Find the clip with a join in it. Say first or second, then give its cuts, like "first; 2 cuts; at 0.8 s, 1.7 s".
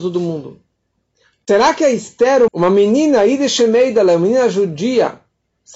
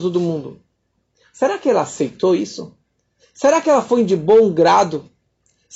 first; 2 cuts; at 1.3 s, 2.5 s